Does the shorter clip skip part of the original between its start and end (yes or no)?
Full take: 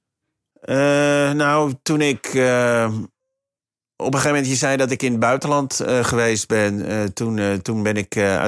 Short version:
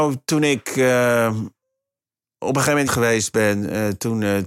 yes